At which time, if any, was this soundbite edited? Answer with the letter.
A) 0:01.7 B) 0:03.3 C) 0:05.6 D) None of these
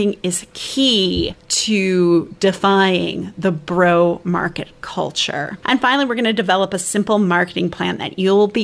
D